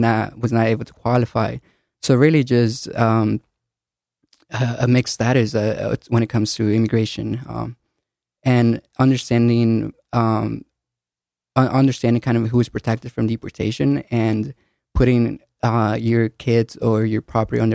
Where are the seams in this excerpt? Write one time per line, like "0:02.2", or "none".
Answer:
none